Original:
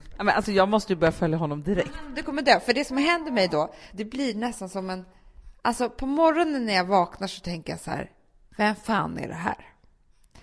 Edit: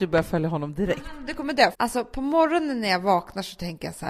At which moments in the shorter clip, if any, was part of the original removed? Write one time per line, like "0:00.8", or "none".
0:01.7